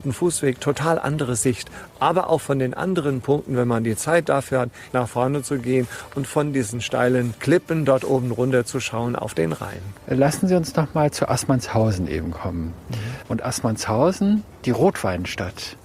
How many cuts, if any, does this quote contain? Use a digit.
2